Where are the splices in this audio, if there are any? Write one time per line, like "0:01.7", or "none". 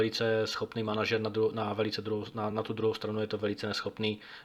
none